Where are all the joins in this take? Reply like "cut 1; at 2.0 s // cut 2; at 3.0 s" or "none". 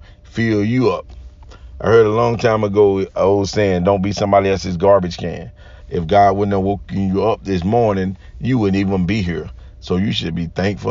cut 1; at 5.8 s